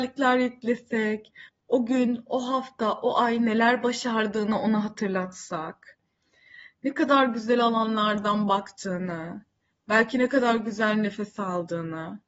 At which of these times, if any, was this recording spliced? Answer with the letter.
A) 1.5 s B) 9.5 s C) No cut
A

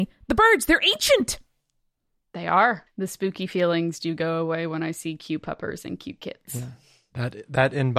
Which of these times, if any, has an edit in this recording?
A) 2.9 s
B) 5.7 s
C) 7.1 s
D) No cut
A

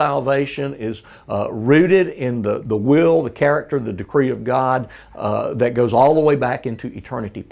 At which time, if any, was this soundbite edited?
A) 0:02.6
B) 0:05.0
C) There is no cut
A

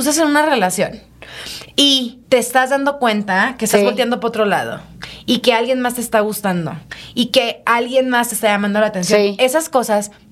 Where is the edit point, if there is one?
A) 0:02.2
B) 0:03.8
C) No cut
A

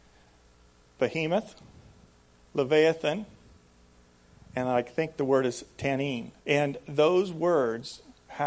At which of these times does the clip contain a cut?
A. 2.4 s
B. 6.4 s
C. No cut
B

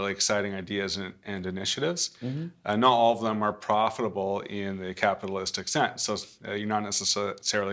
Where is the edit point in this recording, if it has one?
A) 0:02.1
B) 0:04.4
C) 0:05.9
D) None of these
D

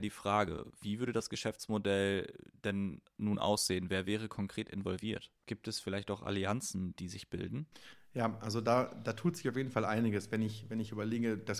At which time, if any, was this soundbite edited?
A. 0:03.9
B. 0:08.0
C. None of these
C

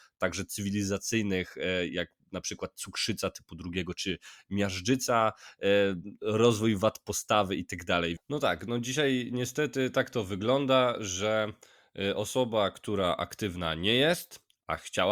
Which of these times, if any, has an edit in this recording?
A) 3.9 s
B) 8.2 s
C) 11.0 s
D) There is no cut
B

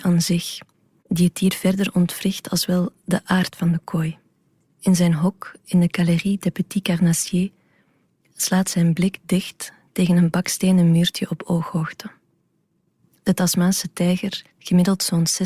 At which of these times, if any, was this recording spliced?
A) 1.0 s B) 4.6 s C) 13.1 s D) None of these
A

